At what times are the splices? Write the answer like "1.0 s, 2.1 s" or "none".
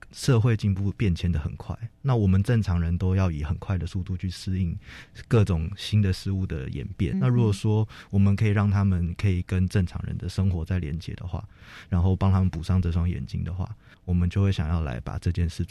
7.1 s